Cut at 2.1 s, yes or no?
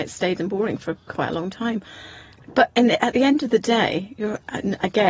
no